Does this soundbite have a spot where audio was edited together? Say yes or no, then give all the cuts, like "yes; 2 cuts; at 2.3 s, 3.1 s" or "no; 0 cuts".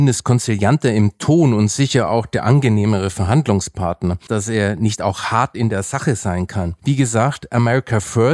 yes; 2 cuts; at 4.3 s, 6.8 s